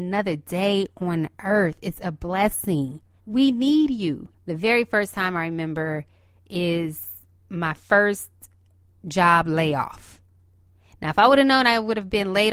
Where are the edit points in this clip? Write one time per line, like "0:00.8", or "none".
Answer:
0:03.2
0:04.3